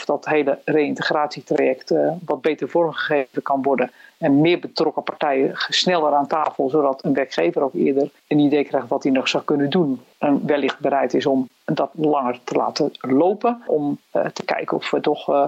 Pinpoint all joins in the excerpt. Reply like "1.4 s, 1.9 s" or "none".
13.7 s